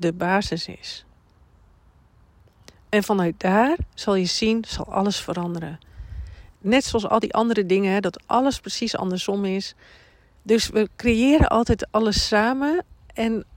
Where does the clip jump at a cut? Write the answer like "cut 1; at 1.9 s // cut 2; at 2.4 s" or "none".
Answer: cut 1; at 6.5 s // cut 2; at 10.4 s

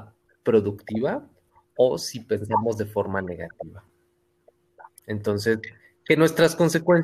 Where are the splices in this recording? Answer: cut 1; at 5.0 s

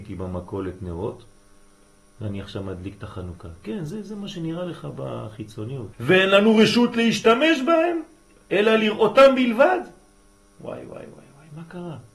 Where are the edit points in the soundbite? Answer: cut 1; at 5.9 s

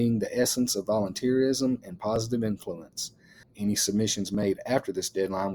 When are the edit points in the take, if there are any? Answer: cut 1; at 3.4 s

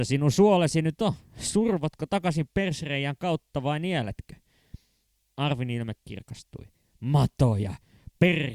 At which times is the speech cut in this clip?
none

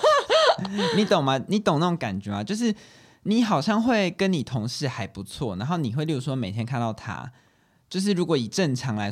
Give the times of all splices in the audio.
none

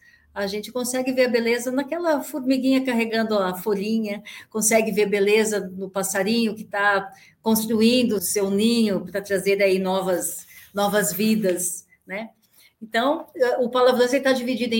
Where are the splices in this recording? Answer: cut 1; at 8.2 s

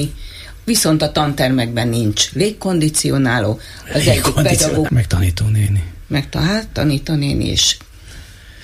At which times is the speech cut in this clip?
cut 1; at 4.9 s

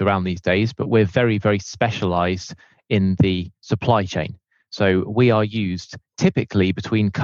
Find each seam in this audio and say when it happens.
none

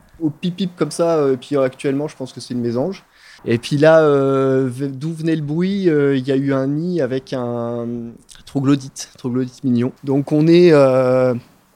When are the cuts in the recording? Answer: cut 1; at 3.4 s // cut 2; at 10.0 s

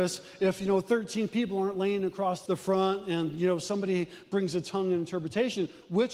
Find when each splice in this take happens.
cut 1; at 2.5 s

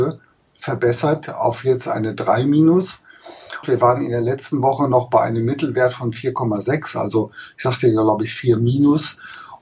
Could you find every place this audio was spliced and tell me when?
cut 1; at 3.6 s

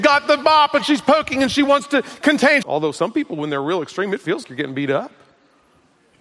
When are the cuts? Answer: cut 1; at 2.6 s // cut 2; at 4.4 s

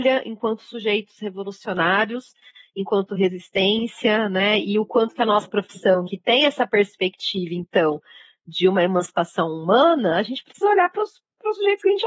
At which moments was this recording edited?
none

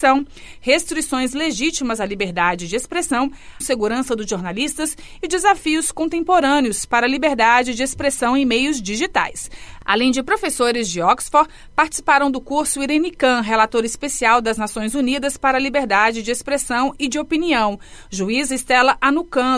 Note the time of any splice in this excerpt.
cut 1; at 3.6 s

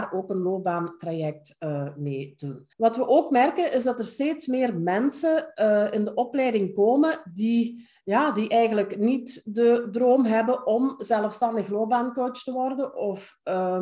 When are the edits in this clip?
cut 1; at 2.7 s

